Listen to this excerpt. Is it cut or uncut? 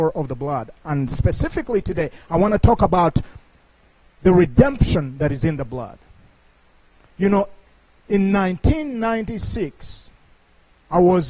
uncut